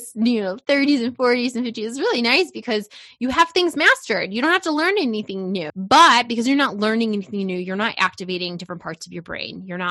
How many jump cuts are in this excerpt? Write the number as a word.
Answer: one